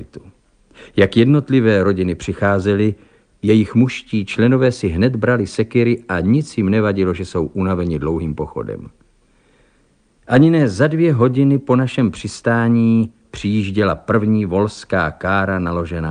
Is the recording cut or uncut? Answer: uncut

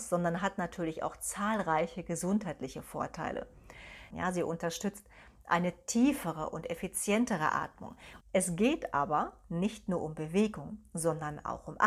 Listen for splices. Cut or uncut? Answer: cut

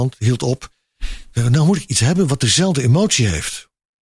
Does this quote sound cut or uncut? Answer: uncut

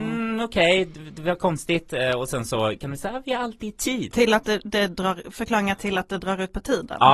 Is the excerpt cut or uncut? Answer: cut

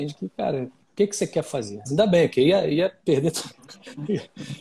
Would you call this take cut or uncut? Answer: cut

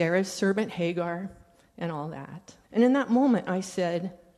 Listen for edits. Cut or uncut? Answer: cut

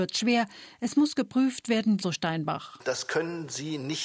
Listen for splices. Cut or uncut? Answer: cut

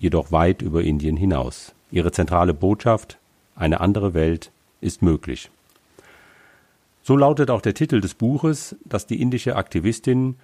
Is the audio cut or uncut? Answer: cut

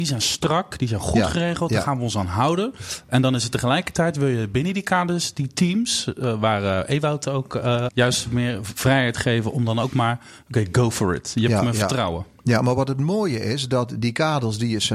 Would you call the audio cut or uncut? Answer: cut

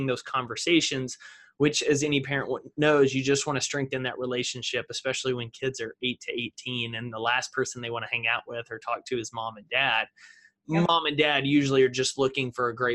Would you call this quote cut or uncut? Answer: uncut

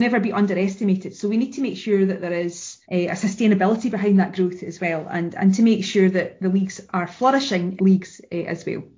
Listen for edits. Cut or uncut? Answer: cut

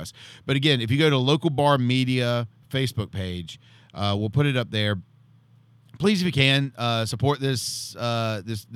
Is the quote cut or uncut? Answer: uncut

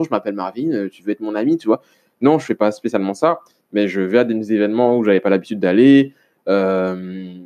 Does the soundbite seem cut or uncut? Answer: uncut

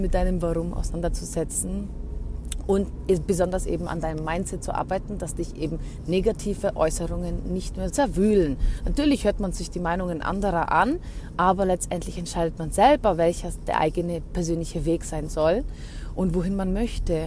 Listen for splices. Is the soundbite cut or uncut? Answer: cut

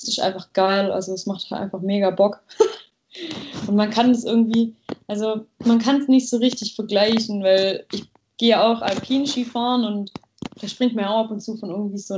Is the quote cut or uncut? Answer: uncut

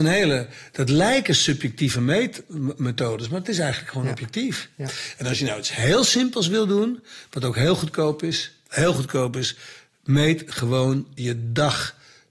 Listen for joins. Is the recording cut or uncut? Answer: uncut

